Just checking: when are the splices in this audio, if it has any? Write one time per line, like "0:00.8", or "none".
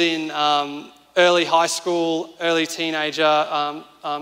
0:01.1